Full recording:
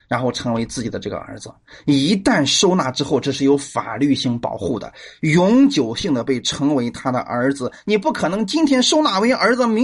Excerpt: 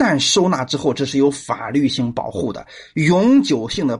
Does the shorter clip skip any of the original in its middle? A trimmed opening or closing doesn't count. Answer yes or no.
no